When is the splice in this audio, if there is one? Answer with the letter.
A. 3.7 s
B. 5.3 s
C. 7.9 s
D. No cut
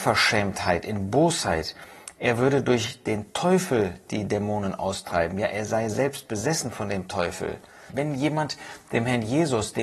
C